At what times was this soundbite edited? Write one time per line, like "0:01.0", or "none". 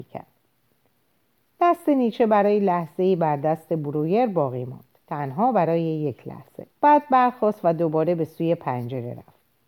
0:05.0
0:06.7

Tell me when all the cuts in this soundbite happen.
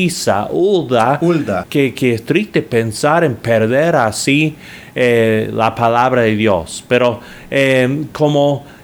0:01.6

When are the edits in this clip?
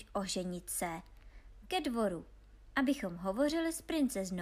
0:01.6

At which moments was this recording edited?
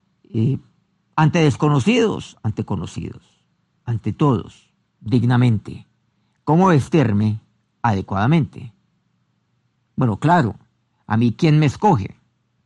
0:04.8
0:09.7

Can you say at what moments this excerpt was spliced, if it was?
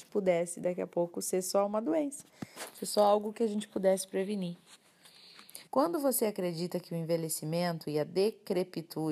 0:05.7

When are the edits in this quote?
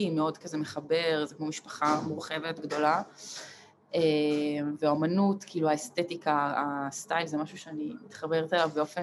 none

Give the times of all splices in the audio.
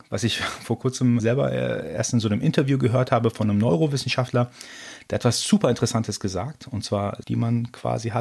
0:01.2
0:07.2

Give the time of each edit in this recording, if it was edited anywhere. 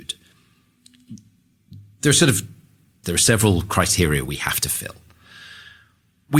0:03.0

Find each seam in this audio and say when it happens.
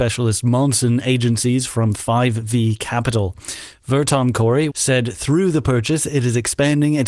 0:04.7

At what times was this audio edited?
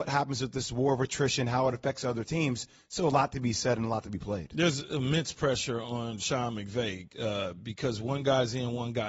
none

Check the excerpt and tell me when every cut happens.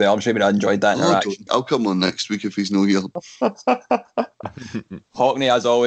0:01.5

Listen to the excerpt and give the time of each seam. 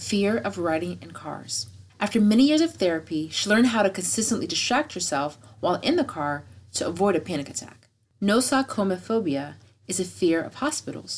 0:01.9
0:08.1

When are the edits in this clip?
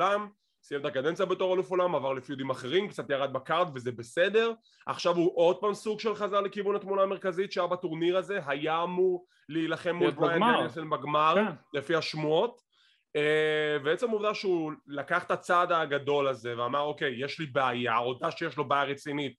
none

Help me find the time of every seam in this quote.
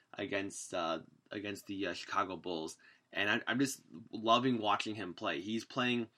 none

